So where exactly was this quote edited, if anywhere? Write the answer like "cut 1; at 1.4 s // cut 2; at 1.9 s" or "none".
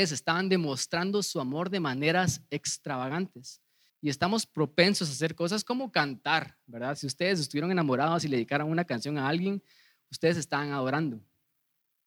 cut 1; at 3.9 s